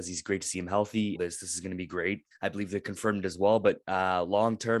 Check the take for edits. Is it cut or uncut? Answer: cut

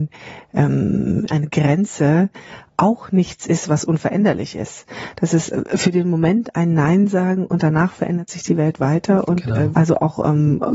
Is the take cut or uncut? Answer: cut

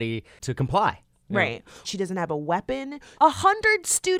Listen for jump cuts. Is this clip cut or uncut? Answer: cut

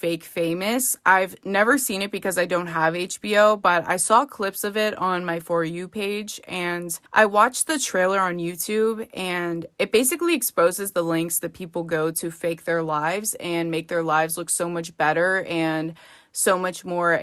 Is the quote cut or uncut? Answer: cut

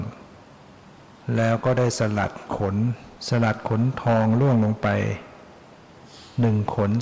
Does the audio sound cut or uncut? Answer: cut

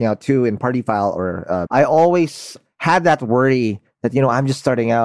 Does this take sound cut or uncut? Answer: cut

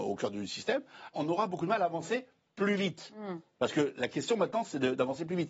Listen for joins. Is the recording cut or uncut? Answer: cut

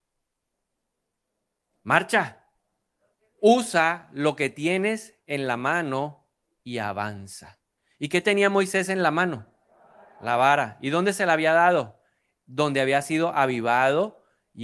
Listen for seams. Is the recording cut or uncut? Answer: uncut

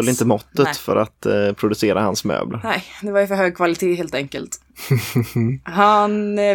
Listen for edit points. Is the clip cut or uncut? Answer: uncut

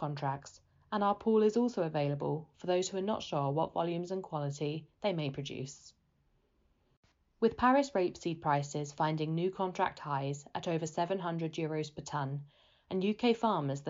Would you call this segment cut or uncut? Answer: cut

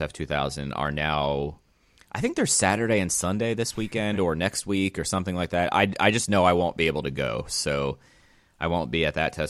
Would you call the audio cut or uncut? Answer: uncut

